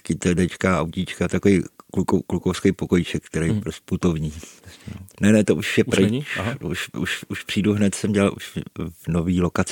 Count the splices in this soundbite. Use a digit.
1